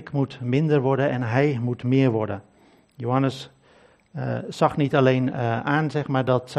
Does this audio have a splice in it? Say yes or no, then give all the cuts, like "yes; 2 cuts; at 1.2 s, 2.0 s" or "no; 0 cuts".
no; 0 cuts